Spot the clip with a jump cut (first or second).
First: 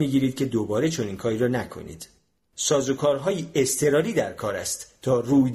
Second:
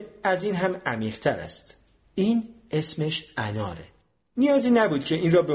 second